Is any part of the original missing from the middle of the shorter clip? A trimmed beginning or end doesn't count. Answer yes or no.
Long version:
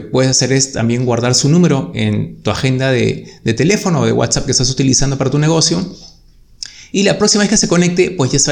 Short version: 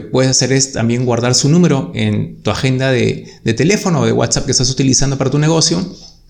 no